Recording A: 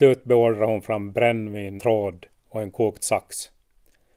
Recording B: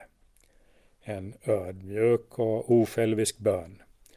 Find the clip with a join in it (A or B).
A